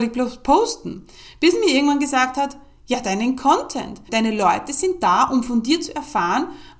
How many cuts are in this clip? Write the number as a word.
one